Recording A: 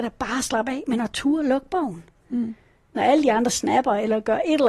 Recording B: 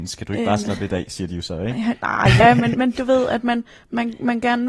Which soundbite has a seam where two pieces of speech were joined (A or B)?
B